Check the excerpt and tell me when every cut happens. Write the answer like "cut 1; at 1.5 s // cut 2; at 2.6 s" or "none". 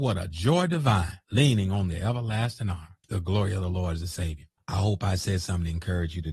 cut 1; at 1.3 s // cut 2; at 3.0 s // cut 3; at 4.6 s